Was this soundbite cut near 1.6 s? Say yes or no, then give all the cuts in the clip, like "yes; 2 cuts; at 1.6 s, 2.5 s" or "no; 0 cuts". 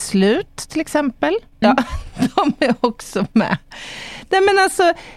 yes; 1 cut; at 1.6 s